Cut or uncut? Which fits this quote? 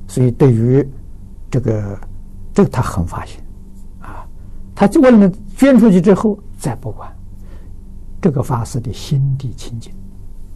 uncut